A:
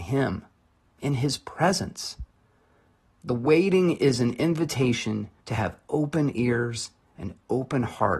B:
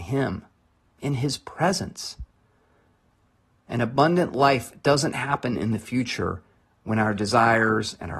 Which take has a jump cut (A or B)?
A